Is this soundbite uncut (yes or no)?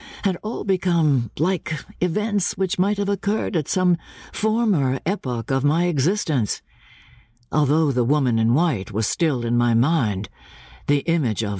yes